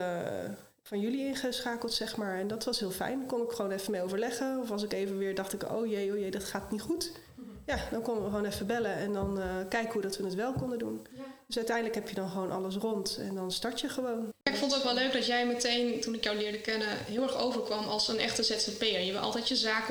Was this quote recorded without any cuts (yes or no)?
yes